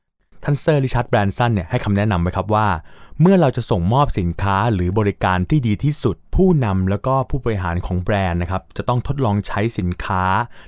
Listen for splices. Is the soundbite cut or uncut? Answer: cut